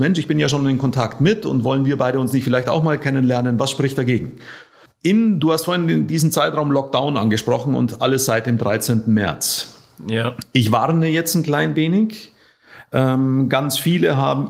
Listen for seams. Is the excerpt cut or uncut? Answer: cut